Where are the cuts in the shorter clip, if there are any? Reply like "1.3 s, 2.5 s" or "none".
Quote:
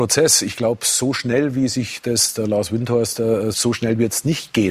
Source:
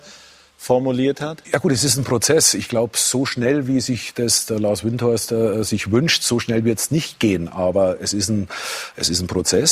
3.5 s